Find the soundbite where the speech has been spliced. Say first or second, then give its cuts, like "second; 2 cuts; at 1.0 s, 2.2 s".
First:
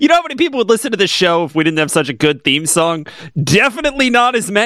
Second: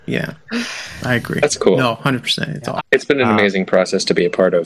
second; 1 cut; at 2.8 s